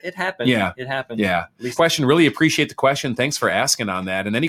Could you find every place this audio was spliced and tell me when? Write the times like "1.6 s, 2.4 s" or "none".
1.8 s